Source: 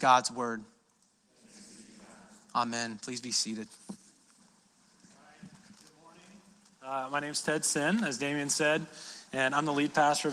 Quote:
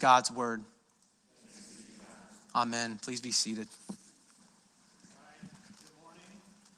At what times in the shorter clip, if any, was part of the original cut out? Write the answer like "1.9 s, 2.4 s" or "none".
none